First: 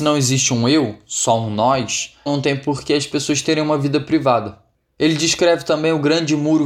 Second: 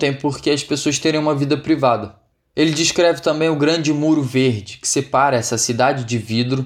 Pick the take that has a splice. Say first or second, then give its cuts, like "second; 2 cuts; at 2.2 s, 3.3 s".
first; 1 cut; at 2.3 s